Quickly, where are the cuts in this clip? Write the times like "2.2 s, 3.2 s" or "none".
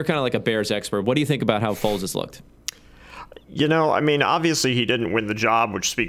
none

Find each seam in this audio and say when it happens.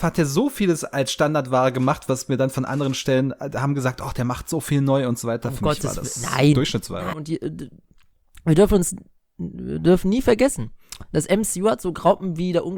7.1 s

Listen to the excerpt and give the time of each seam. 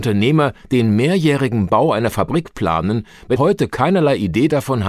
3.4 s

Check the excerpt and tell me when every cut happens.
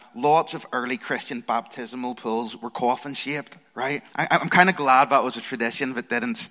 4.1 s

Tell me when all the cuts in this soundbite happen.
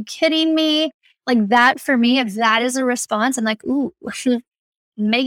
none

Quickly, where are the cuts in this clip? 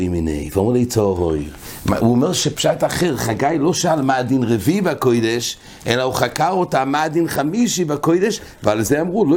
none

